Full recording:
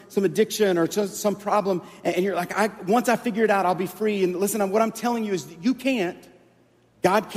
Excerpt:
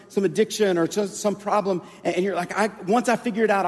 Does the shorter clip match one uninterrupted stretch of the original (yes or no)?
yes